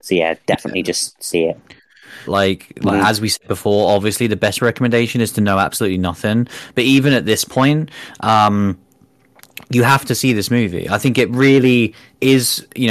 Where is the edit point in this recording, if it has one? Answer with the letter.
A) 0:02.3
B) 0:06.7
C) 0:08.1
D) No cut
A